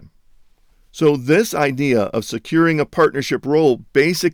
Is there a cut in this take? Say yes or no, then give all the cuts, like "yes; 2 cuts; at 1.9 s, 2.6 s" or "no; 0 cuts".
no; 0 cuts